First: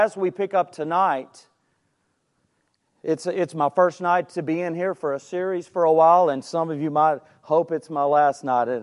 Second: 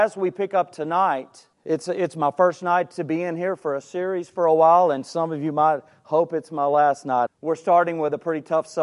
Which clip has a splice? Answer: second; 2 cuts; at 1.5 s, 7.3 s

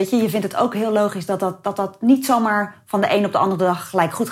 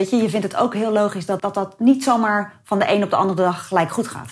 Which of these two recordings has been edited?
second; 1 cut; at 1.4 s

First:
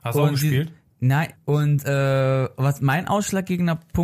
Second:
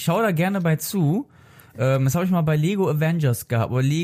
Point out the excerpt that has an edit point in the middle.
first; 1 cut; at 1.3 s

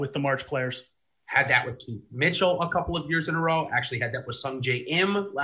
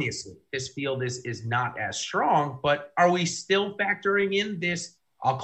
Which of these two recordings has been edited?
first; 1 cut; at 1.1 s

